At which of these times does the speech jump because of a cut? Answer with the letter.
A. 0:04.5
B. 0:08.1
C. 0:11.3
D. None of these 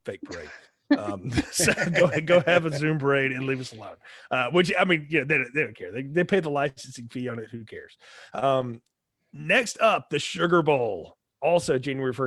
D